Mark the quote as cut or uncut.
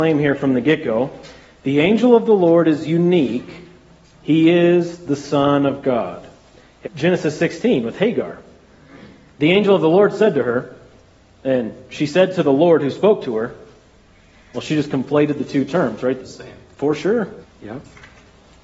cut